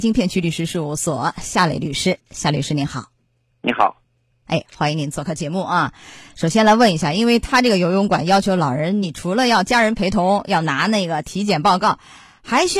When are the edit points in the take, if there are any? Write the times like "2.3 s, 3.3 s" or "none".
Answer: none